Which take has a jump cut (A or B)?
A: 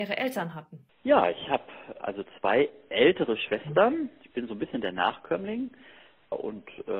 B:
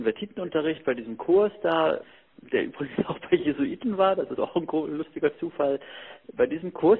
B